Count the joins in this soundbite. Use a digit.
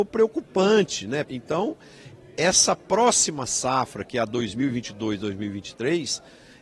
1